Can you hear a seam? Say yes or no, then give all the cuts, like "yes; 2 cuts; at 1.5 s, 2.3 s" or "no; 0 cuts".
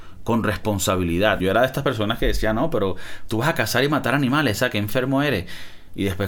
yes; 1 cut; at 1.4 s